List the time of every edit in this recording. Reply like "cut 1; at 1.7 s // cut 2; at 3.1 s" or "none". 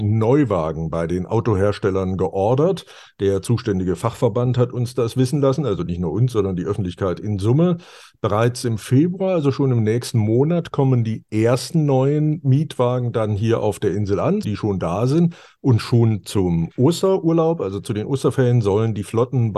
cut 1; at 14.4 s